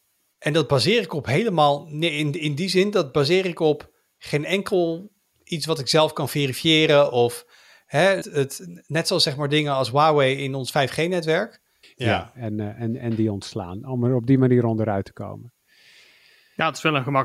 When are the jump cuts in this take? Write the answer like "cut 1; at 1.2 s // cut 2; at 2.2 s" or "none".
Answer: cut 1; at 8.2 s // cut 2; at 11.8 s

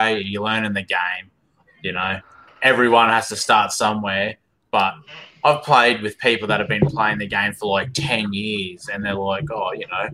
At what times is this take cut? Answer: none

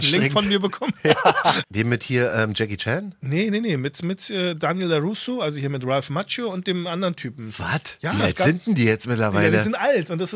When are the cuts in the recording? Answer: cut 1; at 1.6 s

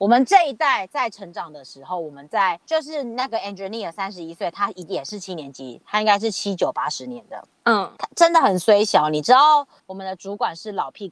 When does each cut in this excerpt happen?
cut 1; at 7.5 s // cut 2; at 9.8 s

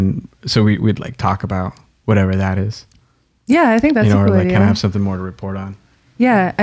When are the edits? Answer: none

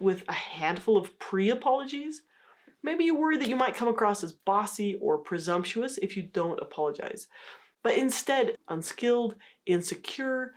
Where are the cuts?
cut 1; at 8.6 s

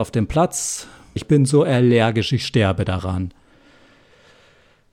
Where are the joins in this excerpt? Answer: cut 1; at 1.2 s

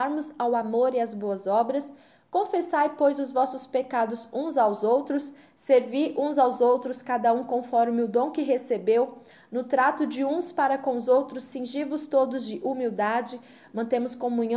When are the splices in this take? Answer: none

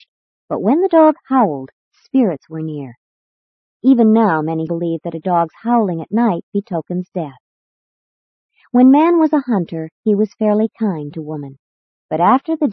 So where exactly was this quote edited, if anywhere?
cut 1; at 4.7 s

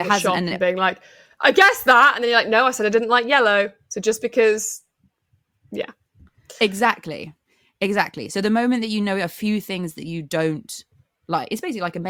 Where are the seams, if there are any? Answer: none

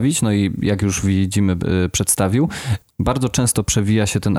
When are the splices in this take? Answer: cut 1; at 2.8 s

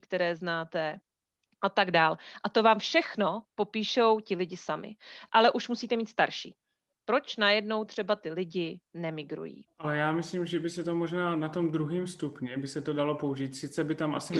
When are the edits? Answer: cut 1; at 6.9 s // cut 2; at 9.7 s

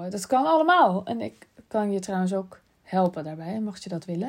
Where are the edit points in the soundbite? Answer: none

